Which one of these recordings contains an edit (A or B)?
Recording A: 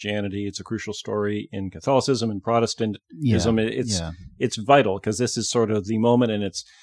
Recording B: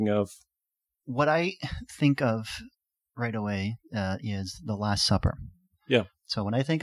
B